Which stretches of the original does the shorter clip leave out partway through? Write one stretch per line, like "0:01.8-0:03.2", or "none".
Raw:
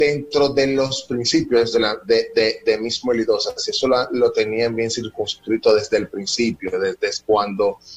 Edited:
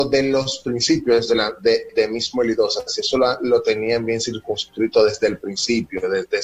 0:02.3-0:02.6